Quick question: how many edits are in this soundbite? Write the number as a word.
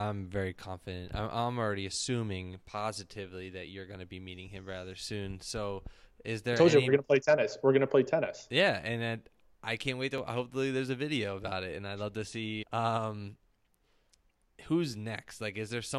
one